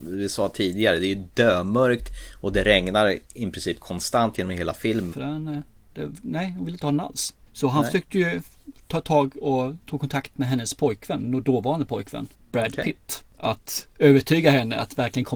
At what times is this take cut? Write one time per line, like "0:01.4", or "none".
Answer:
0:05.1